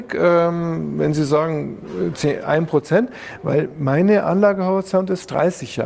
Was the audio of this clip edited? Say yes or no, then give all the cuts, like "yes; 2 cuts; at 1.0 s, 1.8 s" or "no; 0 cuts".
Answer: no; 0 cuts